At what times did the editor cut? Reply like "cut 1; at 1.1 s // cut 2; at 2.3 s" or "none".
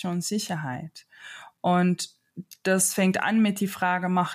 none